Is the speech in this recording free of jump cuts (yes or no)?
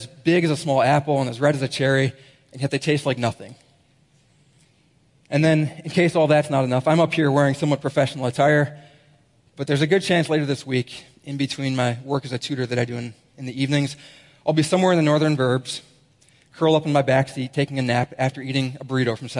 yes